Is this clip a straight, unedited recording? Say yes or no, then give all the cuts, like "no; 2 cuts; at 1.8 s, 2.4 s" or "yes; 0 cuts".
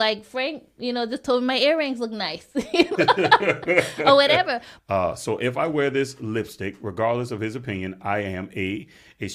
no; 2 cuts; at 3.0 s, 4.8 s